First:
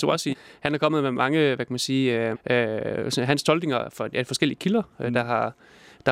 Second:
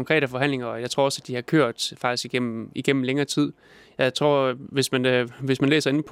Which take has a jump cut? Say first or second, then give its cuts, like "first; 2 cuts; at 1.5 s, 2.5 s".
first; 1 cut; at 2.3 s